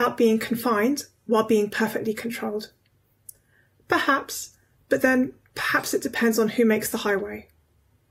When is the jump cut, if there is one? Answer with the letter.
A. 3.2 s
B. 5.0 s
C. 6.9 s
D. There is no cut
D